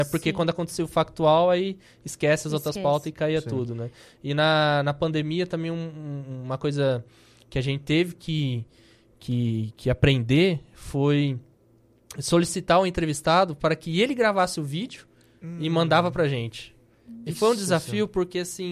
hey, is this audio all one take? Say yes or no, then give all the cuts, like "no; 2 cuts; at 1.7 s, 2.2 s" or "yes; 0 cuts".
yes; 0 cuts